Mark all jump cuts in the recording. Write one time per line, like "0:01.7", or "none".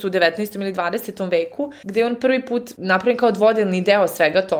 none